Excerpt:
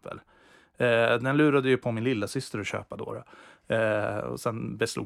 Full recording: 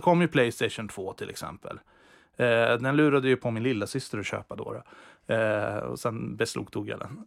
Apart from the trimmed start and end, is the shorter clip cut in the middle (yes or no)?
no